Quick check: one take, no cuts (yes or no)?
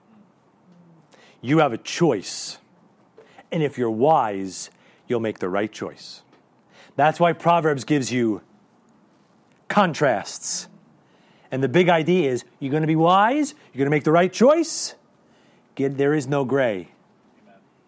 yes